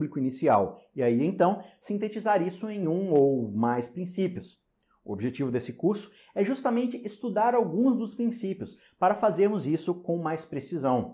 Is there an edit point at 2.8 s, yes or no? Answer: no